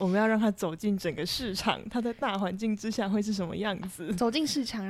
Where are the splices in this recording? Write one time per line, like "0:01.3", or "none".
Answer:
none